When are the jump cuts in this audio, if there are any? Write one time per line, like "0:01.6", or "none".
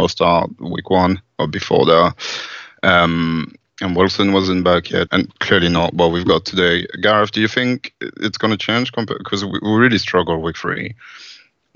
0:05.1